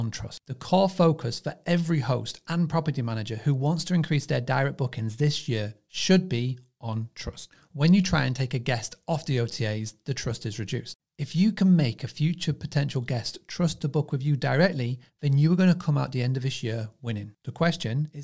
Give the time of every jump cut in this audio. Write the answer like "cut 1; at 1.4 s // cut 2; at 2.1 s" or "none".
none